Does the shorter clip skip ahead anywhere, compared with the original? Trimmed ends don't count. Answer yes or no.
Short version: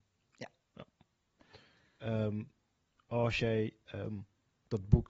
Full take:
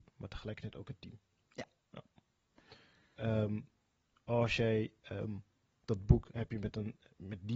no